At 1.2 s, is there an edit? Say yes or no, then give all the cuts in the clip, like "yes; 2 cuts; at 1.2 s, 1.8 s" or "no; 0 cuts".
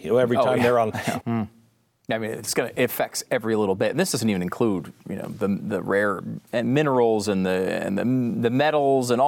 yes; 1 cut; at 1.2 s